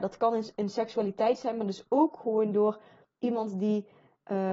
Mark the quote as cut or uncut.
uncut